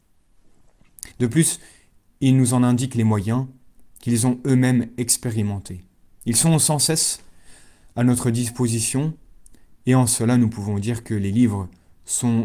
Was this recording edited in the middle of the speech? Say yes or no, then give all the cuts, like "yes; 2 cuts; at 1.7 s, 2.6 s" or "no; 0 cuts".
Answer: yes; 1 cut; at 1.1 s